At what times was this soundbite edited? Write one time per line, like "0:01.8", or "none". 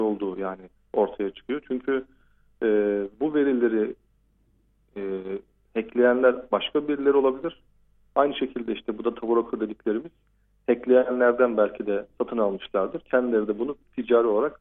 0:03.1

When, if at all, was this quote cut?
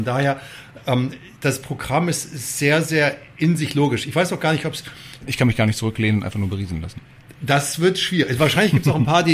0:05.2

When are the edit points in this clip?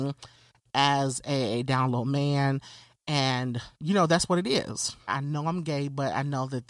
0:05.1

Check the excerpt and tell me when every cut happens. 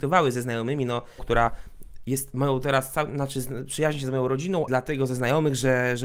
0:01.2
0:04.7

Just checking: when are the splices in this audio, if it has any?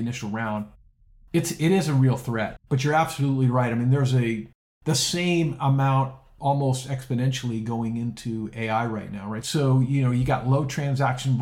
0:02.6
0:09.4

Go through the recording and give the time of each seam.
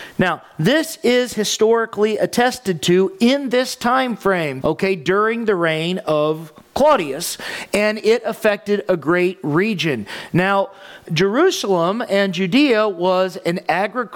0:04.6
0:11.1

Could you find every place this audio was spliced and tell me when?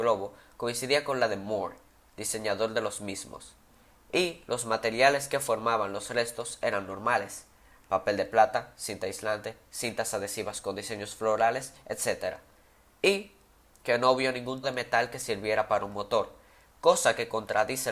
0:14.6

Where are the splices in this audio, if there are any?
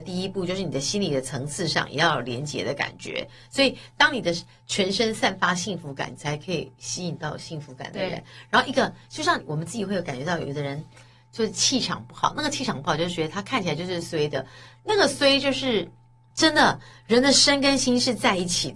0:14.0
0:16.3

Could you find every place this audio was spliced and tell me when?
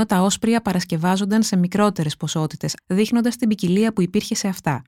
0:02.8

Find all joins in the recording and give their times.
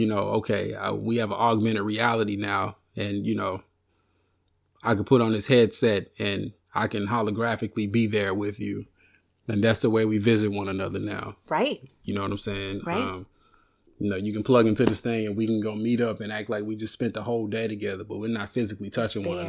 none

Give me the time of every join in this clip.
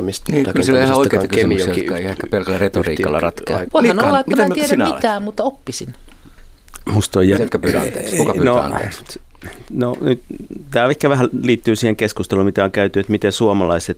0:03.6
0:07.3

